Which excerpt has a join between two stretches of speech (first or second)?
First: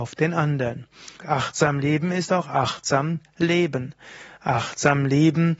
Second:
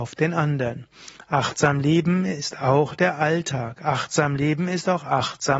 first